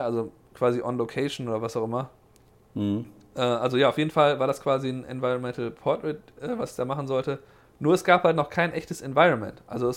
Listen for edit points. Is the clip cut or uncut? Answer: uncut